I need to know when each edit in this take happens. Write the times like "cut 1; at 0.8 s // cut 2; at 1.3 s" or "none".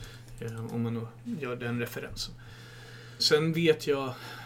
cut 1; at 3.2 s